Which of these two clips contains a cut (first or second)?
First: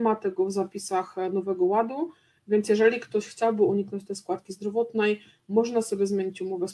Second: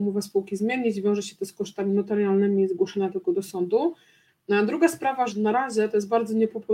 second